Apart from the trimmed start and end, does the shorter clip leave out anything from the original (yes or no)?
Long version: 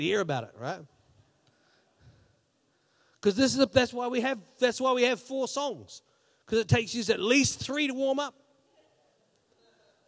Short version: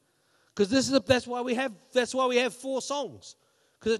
no